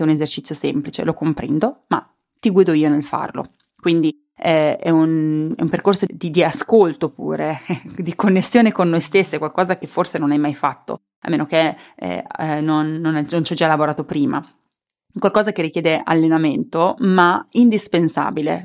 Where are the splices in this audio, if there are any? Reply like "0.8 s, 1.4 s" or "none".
none